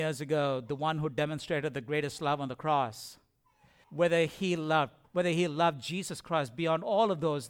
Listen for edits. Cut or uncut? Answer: cut